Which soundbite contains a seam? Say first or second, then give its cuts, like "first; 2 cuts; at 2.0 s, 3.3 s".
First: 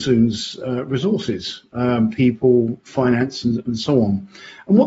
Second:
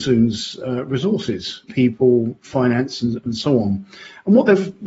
second; 1 cut; at 1.7 s